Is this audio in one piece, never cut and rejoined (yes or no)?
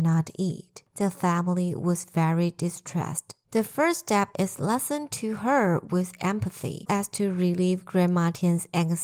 no